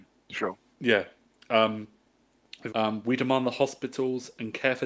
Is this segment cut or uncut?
cut